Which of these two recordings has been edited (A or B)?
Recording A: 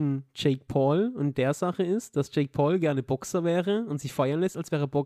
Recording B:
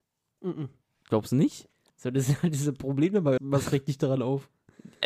B